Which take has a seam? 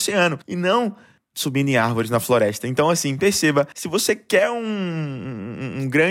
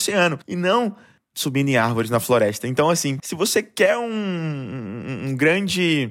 second; 1 cut; at 3.2 s

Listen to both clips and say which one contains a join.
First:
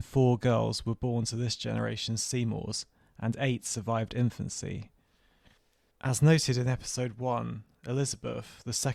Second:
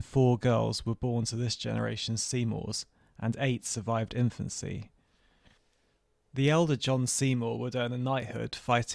first; 1 cut; at 5.9 s

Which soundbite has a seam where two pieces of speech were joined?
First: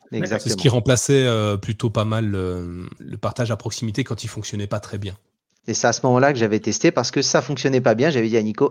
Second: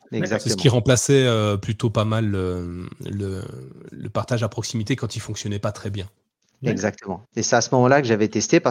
first; 2 cuts; at 3.0 s, 5.6 s

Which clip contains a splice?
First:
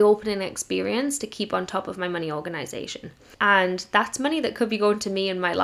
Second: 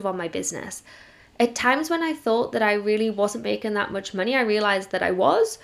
first; 1 cut; at 3.3 s

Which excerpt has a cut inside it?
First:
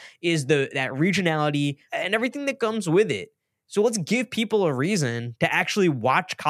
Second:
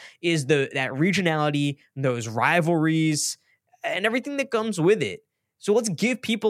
first; 1 cut; at 1.9 s

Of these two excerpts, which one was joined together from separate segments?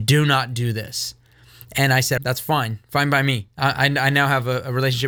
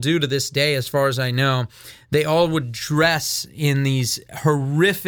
first; 1 cut; at 2.2 s

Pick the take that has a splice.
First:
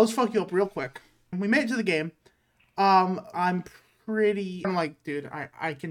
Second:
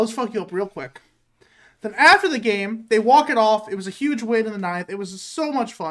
first; 3 cuts; at 1.3 s, 3.3 s, 4.6 s

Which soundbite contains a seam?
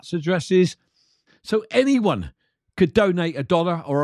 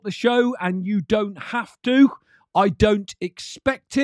first; 1 cut; at 1.3 s

